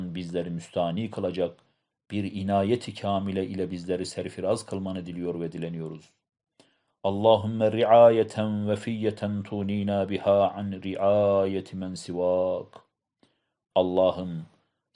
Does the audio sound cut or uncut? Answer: uncut